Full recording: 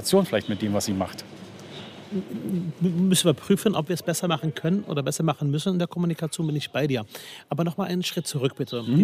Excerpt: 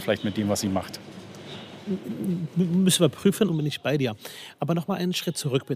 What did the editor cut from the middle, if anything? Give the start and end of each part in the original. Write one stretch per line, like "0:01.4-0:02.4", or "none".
0:03.7-0:06.4